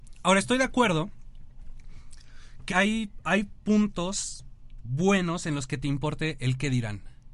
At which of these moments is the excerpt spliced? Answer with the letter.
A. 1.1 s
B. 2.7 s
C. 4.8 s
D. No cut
B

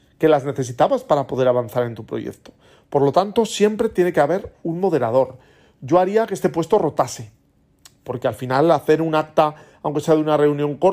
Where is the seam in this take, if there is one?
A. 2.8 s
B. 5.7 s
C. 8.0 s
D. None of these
D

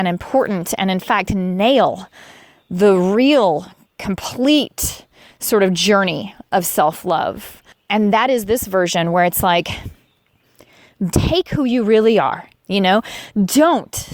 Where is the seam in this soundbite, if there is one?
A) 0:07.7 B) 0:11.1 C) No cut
B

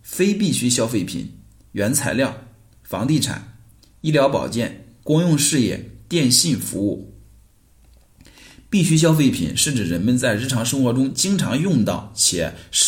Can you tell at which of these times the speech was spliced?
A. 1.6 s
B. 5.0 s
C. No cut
B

